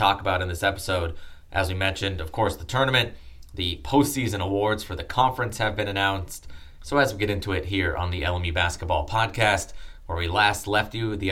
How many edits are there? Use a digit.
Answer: 1